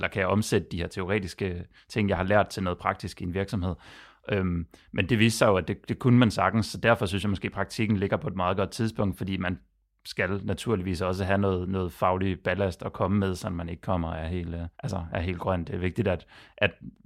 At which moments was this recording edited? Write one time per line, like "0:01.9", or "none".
0:14.7